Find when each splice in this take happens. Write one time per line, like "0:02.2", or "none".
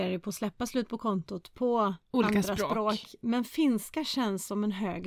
none

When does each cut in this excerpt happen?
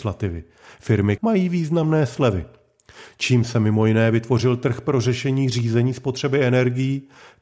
0:01.2

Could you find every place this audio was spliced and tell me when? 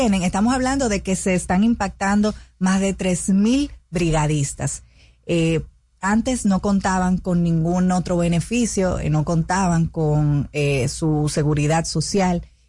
none

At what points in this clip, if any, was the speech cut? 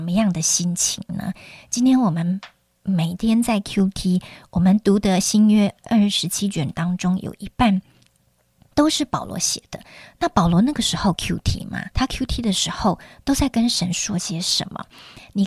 0:11.9

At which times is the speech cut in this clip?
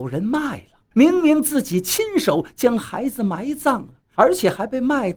0:00.9
0:04.1

